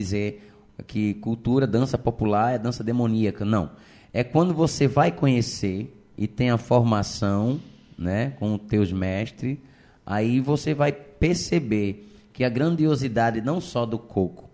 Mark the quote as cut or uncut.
uncut